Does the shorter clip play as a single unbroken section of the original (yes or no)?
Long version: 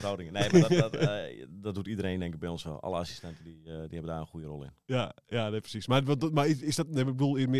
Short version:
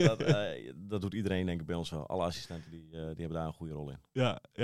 yes